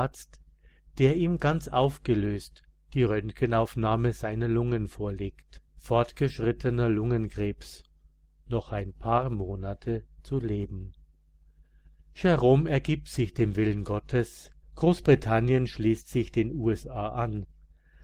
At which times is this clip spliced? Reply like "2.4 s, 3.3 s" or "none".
5.7 s, 14.6 s